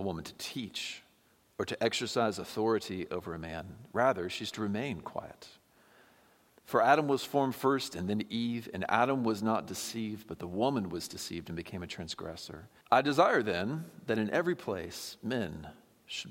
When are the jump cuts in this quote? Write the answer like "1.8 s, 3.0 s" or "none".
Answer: 12.8 s